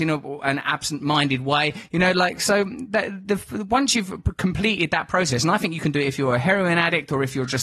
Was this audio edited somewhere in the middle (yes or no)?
no